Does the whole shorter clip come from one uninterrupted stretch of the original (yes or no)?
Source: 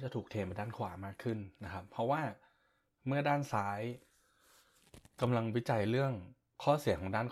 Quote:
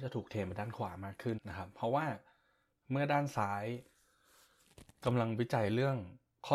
no